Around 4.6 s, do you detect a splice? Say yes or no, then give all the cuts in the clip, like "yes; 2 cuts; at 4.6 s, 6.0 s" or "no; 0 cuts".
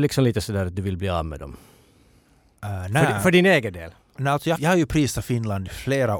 yes; 1 cut; at 4.6 s